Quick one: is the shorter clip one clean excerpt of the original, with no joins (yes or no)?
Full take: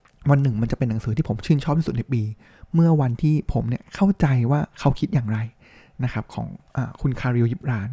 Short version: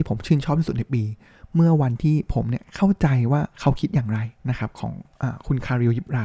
no